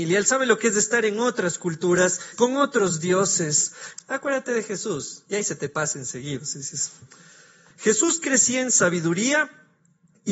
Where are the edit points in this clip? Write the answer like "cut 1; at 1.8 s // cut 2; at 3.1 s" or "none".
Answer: cut 1; at 2.3 s // cut 2; at 3.9 s // cut 3; at 7.7 s